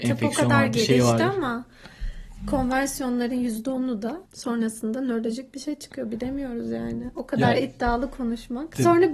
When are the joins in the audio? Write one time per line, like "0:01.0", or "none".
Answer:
0:04.3